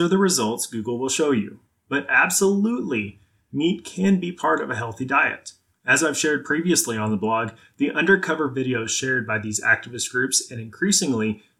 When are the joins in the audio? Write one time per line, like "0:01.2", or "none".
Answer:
0:05.7